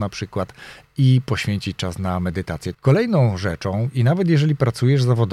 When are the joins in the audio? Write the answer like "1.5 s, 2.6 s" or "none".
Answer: 2.7 s